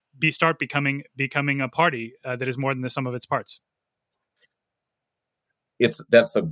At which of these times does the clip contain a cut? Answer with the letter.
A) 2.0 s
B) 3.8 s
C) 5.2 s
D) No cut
D